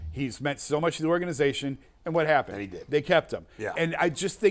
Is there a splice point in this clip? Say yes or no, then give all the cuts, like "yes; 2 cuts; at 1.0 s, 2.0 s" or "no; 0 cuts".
yes; 1 cut; at 1.9 s